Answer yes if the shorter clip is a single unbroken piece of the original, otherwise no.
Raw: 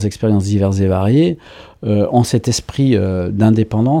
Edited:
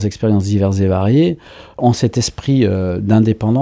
no